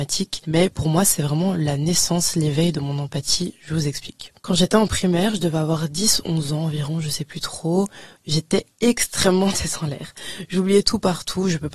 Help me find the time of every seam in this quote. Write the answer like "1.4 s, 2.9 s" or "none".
none